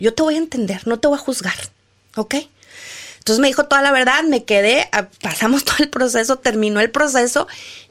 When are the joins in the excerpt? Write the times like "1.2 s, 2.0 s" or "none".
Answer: none